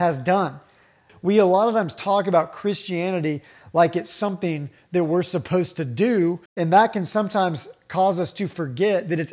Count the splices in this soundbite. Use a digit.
2